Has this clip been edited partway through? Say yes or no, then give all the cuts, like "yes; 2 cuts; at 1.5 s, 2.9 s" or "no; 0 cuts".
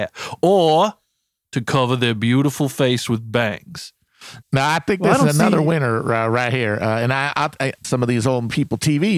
yes; 2 cuts; at 4.4 s, 7.8 s